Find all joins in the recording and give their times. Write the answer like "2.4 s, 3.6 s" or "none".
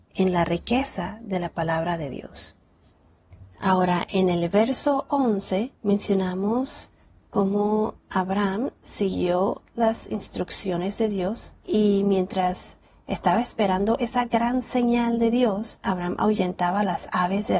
5.8 s, 8.0 s